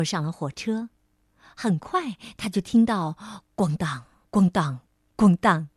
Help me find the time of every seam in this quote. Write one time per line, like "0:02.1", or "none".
0:04.2